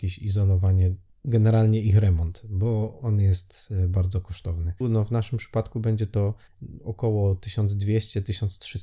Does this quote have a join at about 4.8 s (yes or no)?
yes